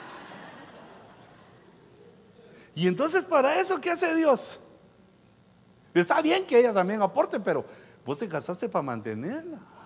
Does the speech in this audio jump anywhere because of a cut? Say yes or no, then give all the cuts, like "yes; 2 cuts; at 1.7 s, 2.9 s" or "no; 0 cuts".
yes; 1 cut; at 5.8 s